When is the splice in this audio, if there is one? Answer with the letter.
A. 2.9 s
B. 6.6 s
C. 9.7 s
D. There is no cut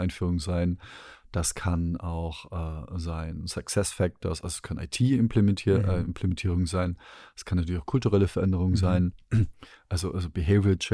D